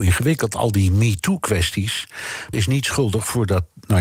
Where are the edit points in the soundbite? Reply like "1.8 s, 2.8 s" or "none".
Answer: 2.5 s